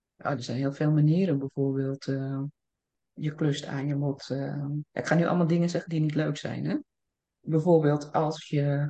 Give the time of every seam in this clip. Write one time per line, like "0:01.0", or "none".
0:04.9